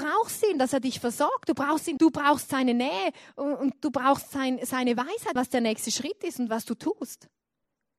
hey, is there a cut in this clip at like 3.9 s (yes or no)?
no